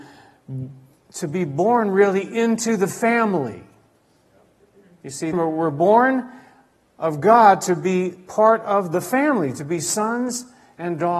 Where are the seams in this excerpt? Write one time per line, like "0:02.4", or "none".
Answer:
0:05.3